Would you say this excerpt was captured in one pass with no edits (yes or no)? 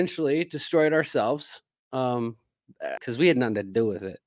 no